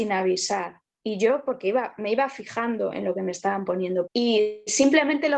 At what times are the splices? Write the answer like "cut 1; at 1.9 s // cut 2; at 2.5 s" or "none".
cut 1; at 4.1 s